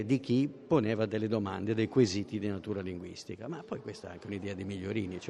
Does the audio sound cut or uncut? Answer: uncut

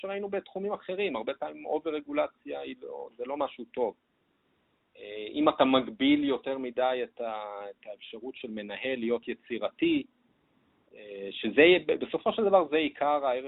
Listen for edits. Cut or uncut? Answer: uncut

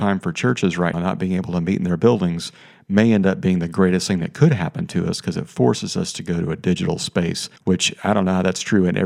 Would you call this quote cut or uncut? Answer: cut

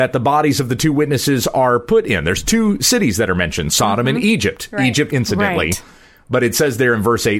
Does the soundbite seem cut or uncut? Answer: cut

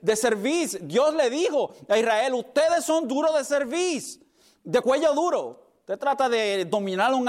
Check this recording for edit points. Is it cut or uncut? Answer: cut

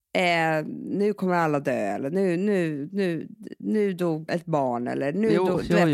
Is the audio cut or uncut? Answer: cut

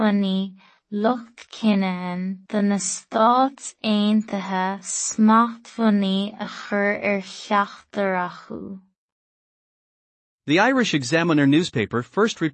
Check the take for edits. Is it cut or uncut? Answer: cut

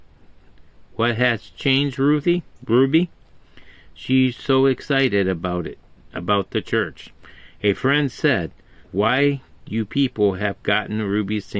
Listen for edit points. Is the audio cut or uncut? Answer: cut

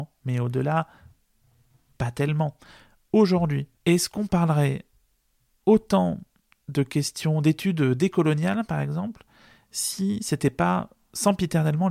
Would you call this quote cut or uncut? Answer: cut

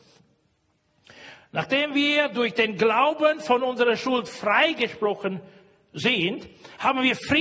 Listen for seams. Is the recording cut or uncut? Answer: uncut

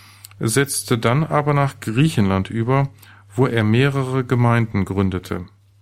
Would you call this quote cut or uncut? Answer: uncut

